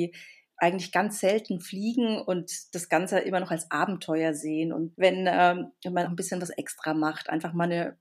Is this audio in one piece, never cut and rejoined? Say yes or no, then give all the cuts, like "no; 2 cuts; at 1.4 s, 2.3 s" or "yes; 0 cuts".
no; 2 cuts; at 4.9 s, 6.1 s